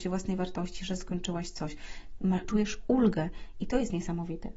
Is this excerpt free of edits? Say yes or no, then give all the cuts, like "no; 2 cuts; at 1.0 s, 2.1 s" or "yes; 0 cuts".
yes; 0 cuts